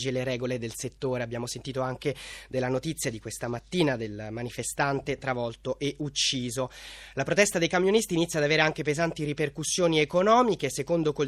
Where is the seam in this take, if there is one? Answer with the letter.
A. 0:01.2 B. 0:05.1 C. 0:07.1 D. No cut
D